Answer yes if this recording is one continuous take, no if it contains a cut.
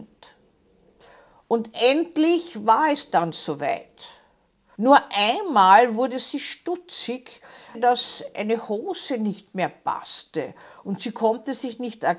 no